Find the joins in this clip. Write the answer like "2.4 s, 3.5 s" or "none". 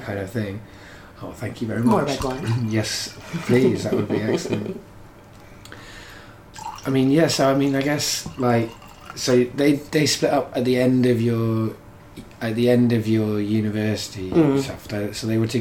none